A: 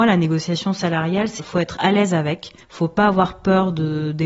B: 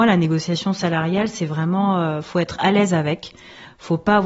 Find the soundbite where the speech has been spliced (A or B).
A